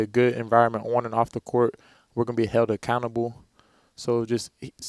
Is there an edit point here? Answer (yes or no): no